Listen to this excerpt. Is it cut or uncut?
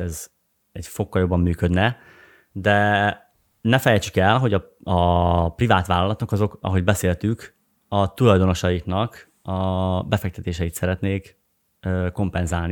uncut